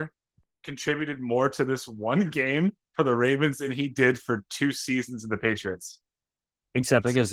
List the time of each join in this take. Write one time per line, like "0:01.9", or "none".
none